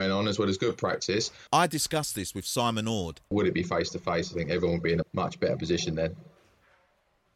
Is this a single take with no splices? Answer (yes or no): no